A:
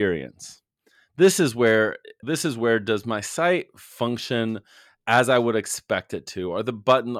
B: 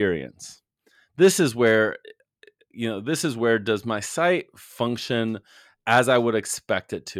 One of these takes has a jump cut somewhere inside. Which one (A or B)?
A